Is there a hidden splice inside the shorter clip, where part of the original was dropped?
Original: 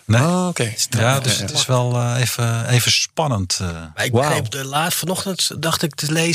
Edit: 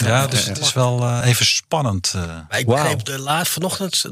yes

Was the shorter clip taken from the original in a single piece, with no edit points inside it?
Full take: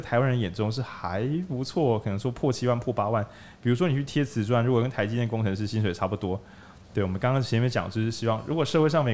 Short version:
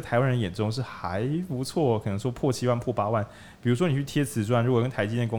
yes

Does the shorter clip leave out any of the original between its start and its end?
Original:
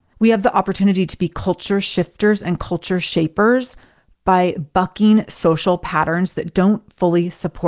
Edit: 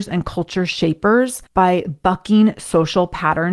yes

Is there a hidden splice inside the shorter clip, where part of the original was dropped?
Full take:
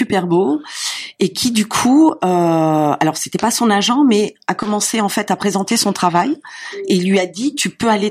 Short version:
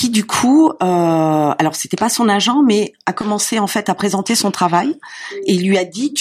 no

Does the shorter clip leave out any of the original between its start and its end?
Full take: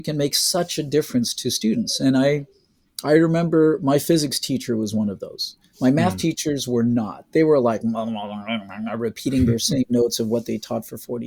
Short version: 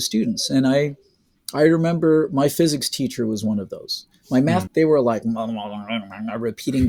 yes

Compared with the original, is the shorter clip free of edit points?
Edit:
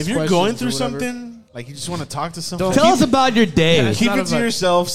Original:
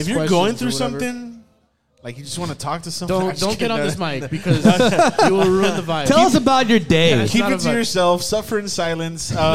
no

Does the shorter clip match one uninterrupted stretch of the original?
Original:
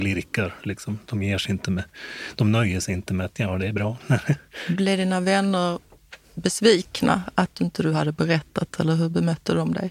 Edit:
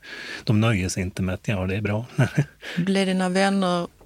yes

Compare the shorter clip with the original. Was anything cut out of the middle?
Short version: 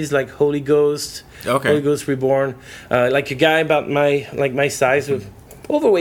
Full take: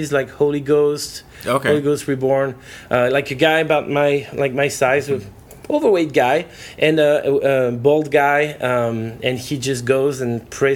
no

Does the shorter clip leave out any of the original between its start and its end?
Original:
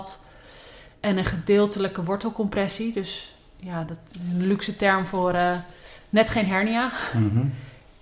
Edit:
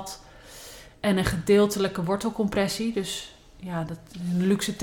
no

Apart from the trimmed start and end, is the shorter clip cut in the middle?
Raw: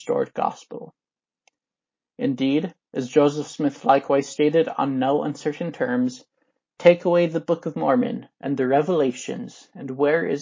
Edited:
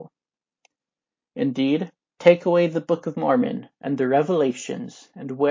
yes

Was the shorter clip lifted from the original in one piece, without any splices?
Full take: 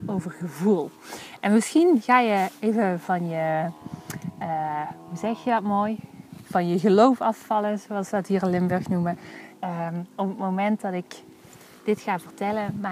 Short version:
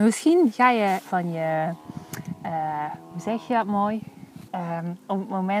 no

